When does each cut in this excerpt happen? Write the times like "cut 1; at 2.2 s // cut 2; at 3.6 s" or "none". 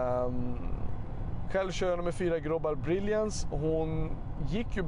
cut 1; at 1.5 s